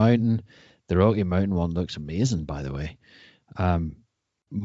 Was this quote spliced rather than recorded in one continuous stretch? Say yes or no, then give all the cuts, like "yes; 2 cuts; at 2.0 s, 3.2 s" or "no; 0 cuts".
no; 0 cuts